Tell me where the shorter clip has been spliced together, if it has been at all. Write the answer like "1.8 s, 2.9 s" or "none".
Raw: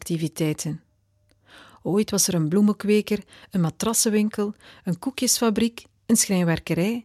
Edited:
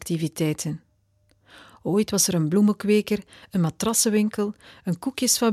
none